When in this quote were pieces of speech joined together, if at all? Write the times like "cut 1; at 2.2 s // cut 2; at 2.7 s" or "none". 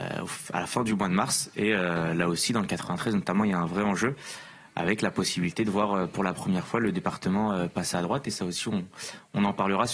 none